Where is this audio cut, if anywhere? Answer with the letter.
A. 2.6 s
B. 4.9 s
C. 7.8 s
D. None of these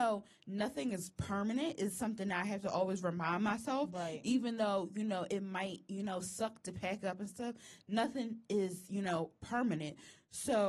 D